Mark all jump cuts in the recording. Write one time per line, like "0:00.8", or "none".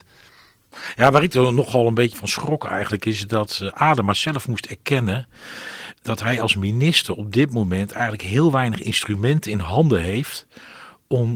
0:02.1